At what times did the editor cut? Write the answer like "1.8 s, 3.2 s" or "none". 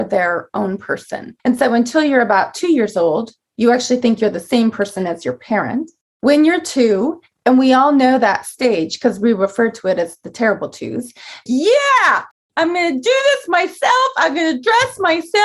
11.5 s